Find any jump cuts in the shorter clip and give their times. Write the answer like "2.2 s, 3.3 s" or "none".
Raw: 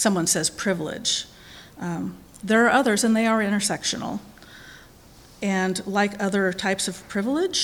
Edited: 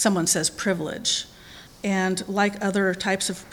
1.7 s